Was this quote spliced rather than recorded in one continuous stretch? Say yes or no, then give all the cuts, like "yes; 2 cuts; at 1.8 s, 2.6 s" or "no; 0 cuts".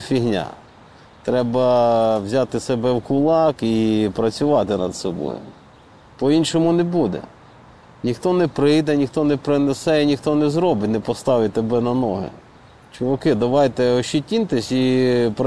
no; 0 cuts